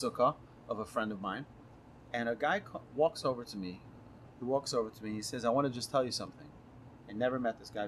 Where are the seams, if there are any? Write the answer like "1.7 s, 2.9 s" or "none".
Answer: 4.3 s

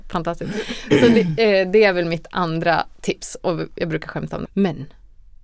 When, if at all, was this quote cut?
4.5 s

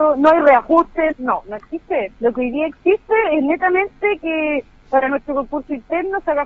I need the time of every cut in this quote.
1.1 s, 2.2 s

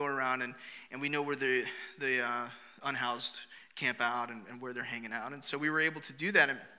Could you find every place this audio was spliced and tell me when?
none

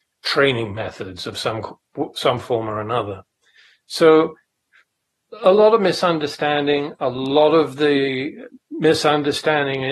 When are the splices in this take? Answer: none

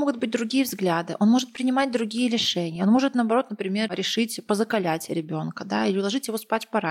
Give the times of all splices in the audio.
none

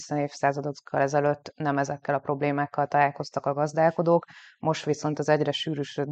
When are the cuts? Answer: none

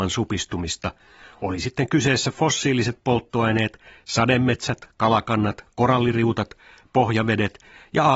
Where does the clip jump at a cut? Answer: none

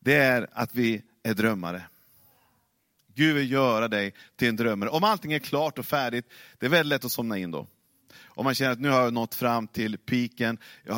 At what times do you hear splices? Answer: none

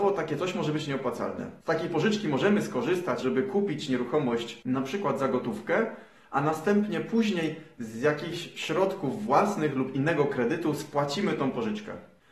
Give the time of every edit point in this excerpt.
3.2 s

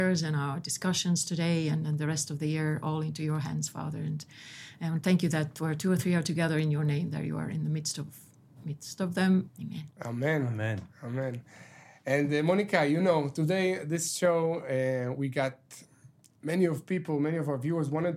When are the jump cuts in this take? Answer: 9.5 s

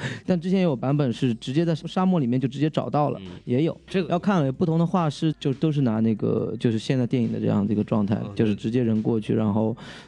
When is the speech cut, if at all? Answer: 5.3 s

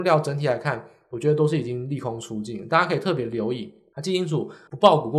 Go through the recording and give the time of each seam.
none

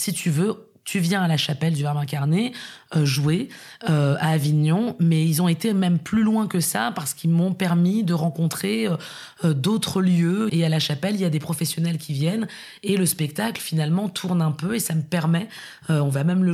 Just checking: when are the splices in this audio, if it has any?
10.5 s

